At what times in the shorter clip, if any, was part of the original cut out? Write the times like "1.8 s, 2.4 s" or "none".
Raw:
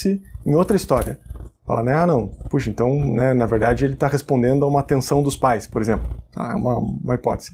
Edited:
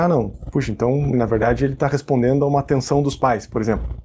1.1 s